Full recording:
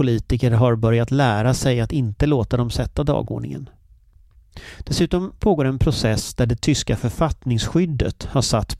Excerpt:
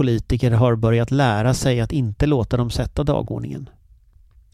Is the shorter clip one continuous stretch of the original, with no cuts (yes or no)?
yes